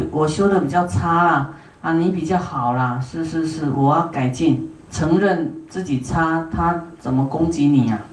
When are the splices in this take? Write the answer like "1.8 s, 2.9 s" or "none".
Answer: 4.8 s